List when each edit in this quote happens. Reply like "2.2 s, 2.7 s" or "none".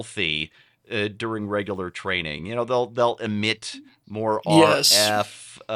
none

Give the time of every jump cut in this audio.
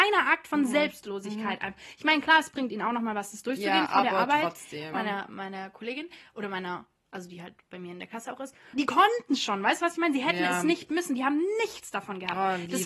4.9 s, 8.7 s

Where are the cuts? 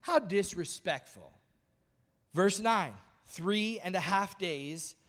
2.3 s

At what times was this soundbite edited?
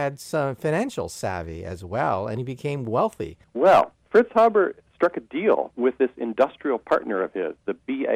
3.4 s

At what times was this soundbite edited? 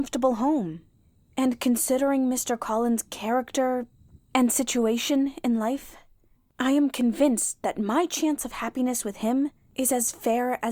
4.2 s

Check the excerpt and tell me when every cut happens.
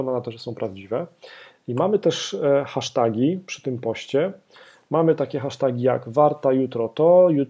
none

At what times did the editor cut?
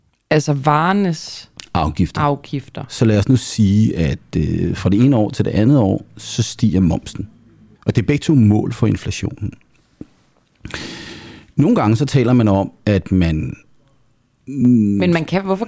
7.8 s

